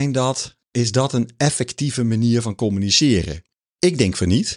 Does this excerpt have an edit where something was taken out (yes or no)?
no